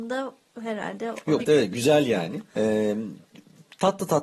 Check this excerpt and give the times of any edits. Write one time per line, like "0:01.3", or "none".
0:01.4